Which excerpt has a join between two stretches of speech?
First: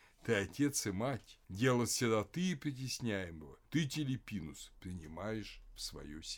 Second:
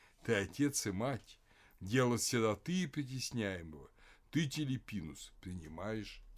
first; 2 cuts; at 1.4 s, 3.6 s

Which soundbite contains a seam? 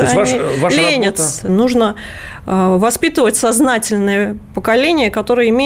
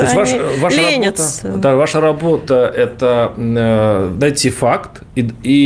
first; 1 cut; at 1.5 s

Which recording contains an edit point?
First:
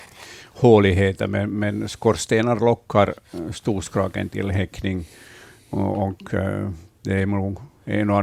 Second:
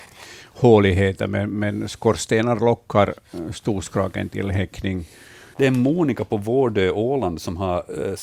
second; 1 cut; at 5.5 s

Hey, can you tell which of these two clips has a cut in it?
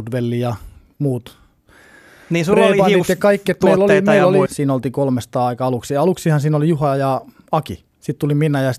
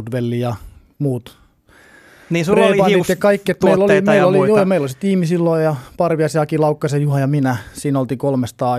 first; 1 cut; at 4.5 s

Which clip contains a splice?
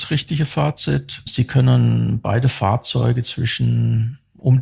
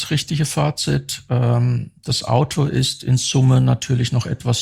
first; 1 cut; at 1.3 s

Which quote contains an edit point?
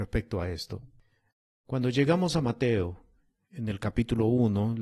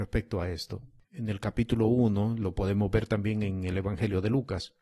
second; 1 cut; at 1.0 s

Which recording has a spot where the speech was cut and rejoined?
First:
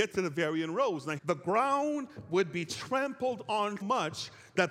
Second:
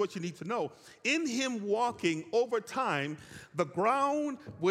first; 2 cuts; at 1.2 s, 3.8 s

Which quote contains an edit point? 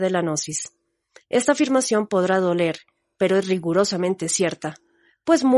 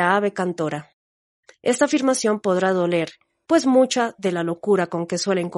second; 2 cuts; at 1.5 s, 3.4 s

